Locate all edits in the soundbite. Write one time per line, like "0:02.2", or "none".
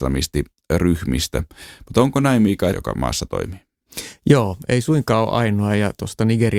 0:02.7